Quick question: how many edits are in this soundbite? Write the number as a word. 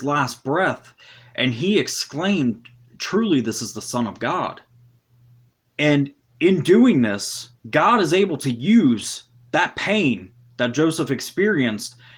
two